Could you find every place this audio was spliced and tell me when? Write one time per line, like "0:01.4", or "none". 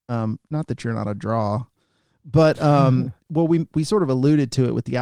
0:03.3